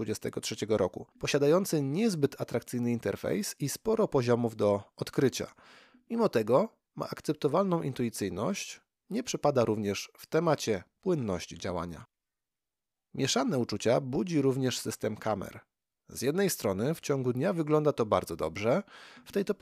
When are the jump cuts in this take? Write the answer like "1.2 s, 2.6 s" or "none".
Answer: 1.1 s

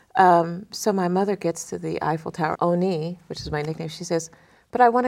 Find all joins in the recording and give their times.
2.5 s

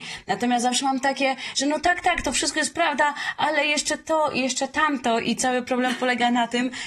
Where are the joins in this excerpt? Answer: none

